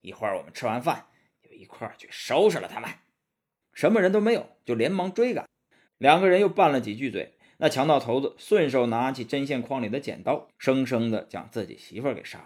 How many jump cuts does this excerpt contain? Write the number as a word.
three